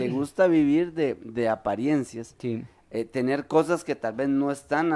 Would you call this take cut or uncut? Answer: uncut